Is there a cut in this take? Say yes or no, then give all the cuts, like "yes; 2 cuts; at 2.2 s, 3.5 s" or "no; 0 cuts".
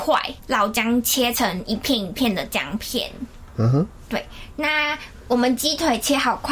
no; 0 cuts